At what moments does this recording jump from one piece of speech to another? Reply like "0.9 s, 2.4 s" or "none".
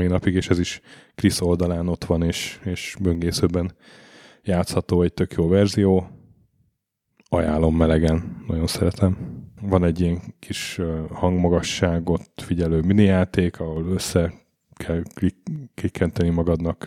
9.6 s